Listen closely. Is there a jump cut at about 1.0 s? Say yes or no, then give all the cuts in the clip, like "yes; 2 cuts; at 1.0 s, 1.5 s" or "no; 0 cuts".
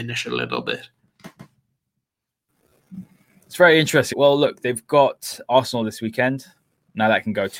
no; 2 cuts; at 4.1 s, 5.5 s